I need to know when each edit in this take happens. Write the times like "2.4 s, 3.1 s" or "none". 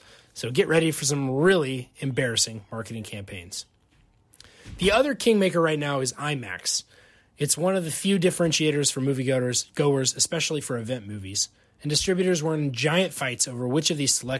none